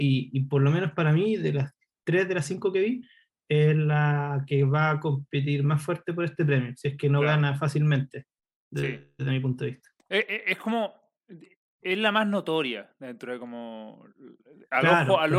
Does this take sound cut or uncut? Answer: uncut